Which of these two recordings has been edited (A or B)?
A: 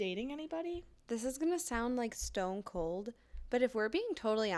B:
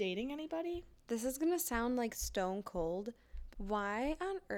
B